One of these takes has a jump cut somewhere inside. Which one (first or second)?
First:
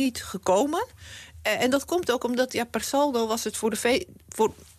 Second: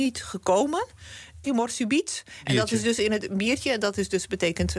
second